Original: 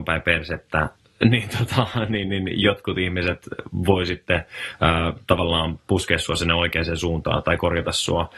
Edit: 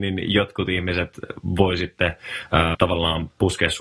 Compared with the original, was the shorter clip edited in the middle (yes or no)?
yes